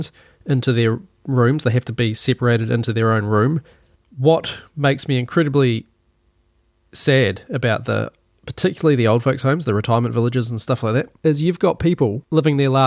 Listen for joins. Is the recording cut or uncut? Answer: cut